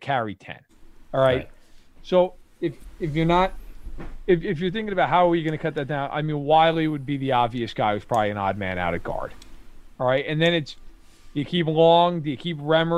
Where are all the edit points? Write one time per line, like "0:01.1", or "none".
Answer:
none